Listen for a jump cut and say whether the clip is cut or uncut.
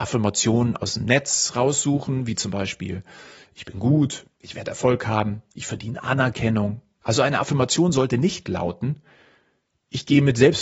cut